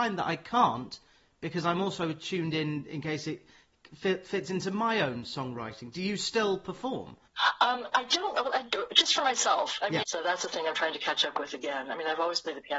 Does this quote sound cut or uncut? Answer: cut